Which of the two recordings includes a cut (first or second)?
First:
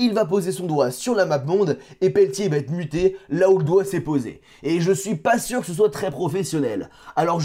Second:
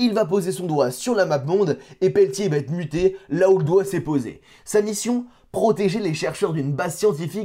second